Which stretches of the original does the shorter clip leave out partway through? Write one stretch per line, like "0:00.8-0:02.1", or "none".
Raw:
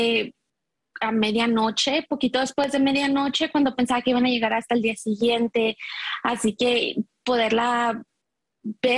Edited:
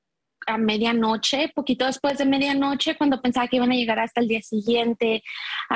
none